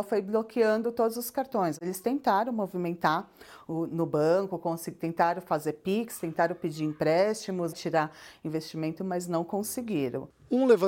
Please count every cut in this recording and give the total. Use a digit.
1